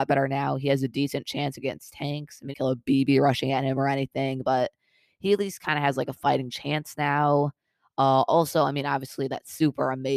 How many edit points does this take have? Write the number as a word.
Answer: one